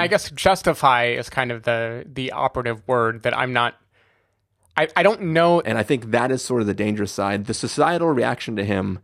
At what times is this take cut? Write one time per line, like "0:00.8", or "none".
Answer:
0:05.6

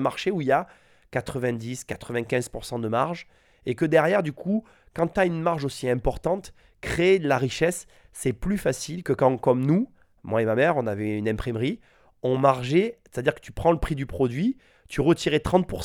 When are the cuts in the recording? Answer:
none

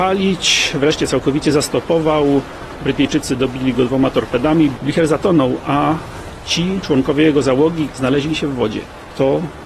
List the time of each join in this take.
0:04.8
0:07.9

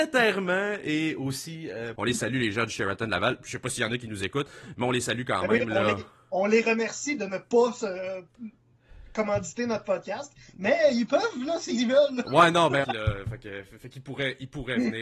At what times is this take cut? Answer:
0:02.0
0:12.8

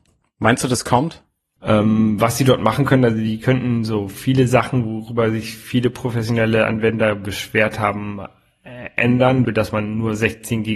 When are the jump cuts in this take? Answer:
0:01.6
0:09.4

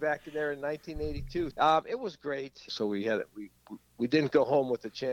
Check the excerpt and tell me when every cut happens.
0:01.5
0:02.7

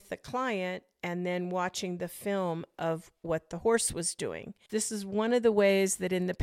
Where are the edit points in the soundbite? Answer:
0:04.7

